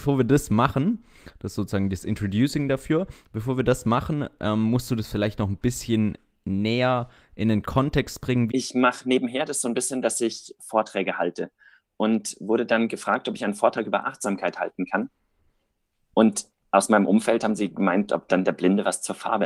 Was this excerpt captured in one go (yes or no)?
no